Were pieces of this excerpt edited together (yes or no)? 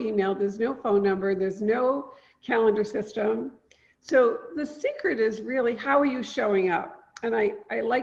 no